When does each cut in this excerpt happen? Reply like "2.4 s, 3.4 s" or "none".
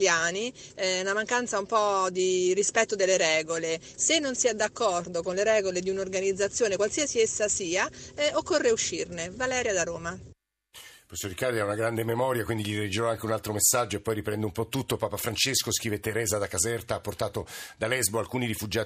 none